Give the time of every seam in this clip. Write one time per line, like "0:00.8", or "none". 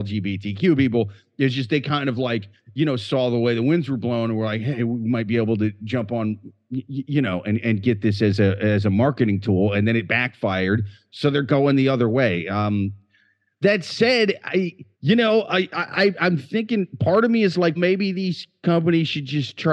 0:14.9
0:17.8